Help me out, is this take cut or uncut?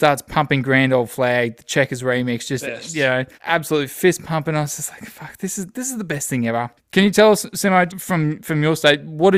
cut